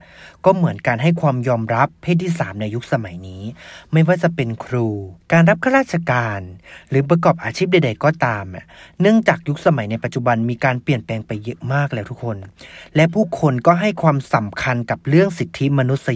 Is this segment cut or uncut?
cut